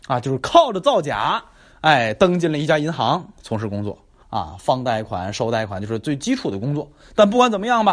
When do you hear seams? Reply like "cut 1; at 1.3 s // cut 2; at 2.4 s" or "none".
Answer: cut 1; at 4.2 s